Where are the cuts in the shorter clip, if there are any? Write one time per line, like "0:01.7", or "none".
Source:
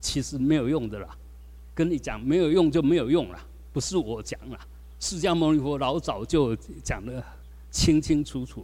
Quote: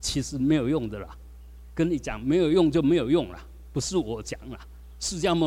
none